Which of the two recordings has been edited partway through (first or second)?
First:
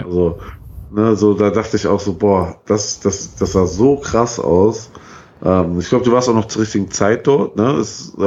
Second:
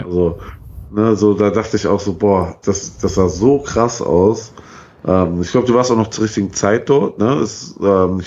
second